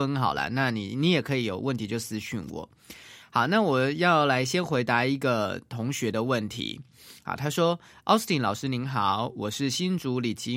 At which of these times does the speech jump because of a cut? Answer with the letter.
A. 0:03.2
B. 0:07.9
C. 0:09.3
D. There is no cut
D